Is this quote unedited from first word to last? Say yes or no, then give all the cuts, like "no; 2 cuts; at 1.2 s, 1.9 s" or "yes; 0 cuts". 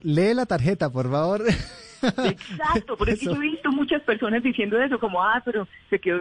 yes; 0 cuts